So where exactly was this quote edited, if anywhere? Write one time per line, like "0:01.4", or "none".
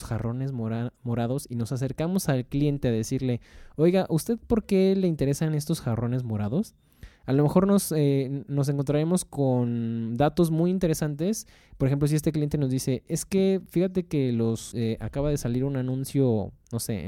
0:14.7